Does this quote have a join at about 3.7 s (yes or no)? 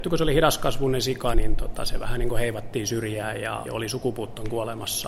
yes